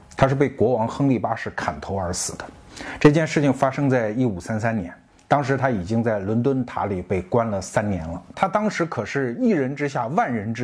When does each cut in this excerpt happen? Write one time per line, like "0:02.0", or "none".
0:08.3